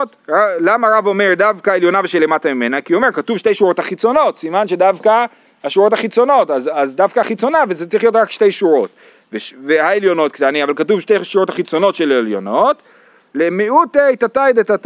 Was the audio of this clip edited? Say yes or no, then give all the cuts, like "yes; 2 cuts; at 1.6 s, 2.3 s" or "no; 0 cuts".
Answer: no; 0 cuts